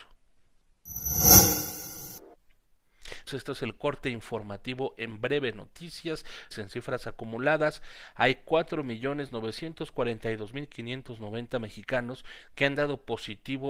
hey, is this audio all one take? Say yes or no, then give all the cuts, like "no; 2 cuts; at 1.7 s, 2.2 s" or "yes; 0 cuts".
no; 2 cuts; at 3.3 s, 6.5 s